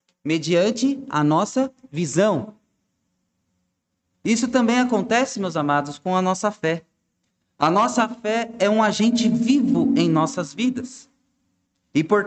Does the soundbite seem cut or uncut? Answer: uncut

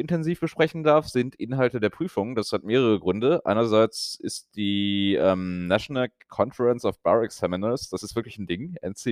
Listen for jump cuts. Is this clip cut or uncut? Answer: uncut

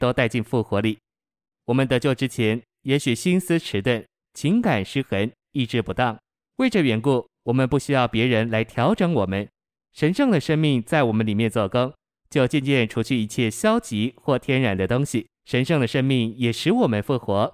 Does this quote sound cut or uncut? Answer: cut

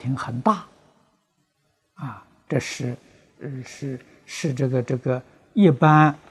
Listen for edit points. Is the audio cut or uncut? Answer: uncut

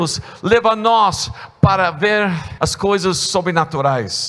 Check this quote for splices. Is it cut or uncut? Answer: cut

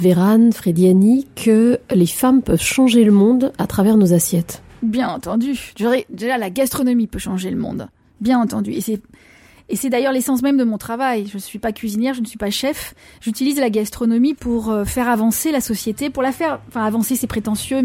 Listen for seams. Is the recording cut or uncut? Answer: uncut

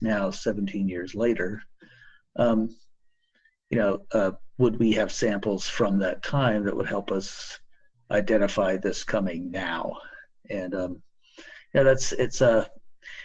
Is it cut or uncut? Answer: uncut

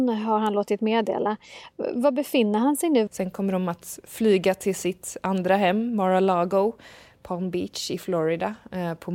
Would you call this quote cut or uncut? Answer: cut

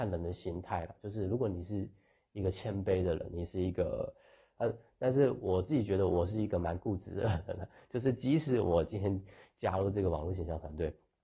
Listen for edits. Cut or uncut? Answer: cut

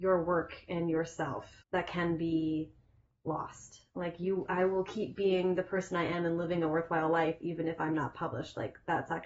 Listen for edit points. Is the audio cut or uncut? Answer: cut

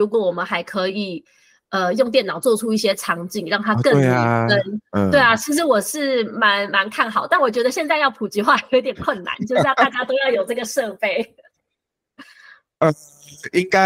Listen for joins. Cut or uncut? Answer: uncut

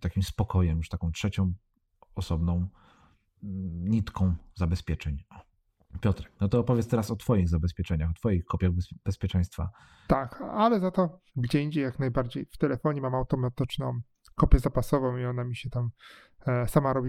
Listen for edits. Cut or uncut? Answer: cut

